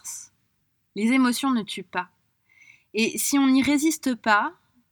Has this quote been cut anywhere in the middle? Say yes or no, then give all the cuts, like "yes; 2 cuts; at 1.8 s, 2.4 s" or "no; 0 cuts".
no; 0 cuts